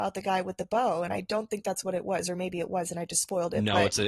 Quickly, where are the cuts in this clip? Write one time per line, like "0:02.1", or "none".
none